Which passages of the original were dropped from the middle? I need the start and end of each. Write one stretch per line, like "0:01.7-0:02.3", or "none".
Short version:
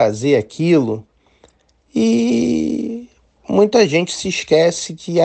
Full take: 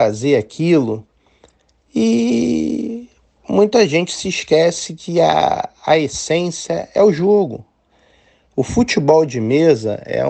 none